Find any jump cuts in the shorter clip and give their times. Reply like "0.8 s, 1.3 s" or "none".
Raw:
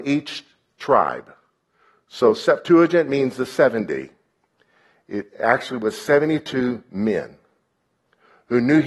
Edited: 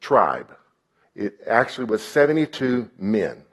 1.0 s